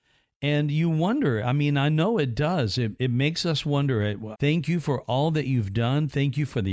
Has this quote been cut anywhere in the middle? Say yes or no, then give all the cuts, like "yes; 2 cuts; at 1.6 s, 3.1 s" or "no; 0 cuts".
yes; 1 cut; at 4.3 s